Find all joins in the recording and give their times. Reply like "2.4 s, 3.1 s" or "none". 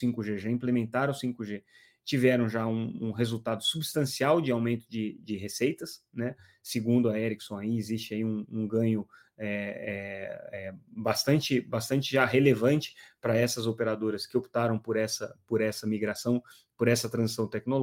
none